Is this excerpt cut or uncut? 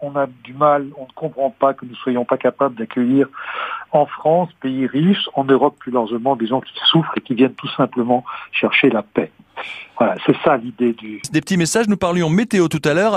cut